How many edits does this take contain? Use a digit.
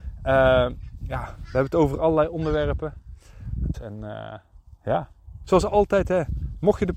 2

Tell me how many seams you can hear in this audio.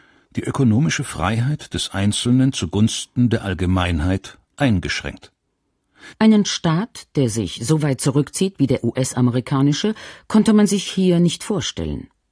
1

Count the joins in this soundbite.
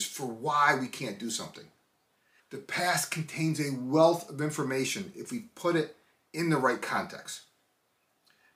1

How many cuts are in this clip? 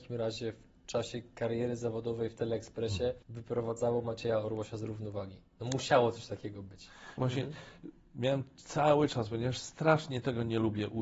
2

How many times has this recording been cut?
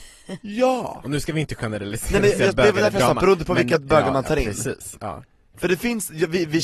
0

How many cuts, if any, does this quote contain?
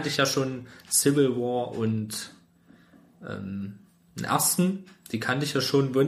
0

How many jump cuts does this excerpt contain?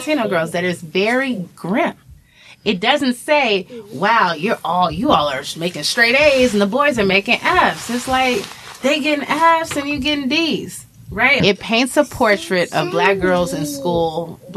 1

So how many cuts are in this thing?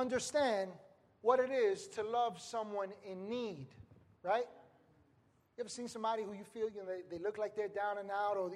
0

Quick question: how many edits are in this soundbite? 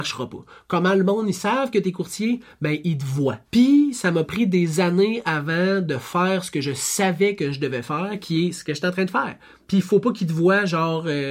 2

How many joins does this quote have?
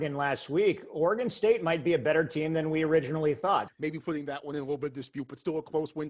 1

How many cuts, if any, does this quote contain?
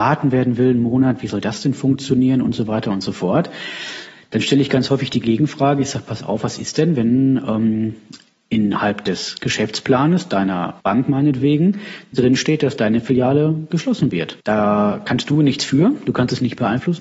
2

